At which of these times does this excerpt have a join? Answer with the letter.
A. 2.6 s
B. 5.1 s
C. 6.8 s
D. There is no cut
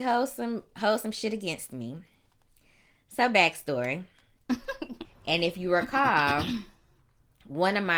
B